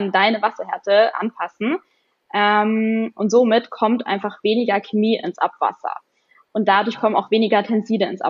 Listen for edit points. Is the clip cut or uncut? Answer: uncut